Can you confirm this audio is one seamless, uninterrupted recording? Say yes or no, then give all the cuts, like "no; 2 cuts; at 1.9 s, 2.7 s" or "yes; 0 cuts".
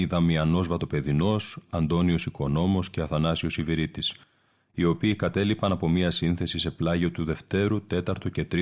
yes; 0 cuts